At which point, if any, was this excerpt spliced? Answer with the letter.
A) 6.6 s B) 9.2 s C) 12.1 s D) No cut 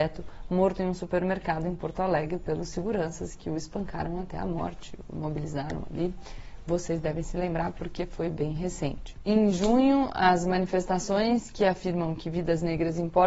D